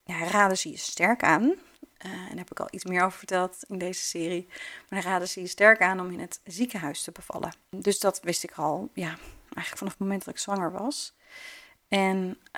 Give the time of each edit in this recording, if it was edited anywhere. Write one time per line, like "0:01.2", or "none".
none